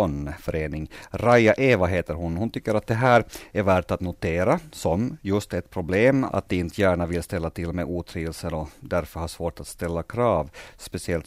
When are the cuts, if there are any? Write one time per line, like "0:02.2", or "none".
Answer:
0:06.3